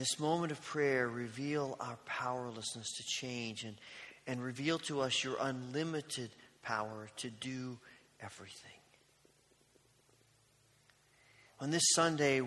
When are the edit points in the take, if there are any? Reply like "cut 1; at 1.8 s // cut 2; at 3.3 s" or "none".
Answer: none